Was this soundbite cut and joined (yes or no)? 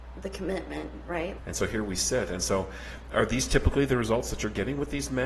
yes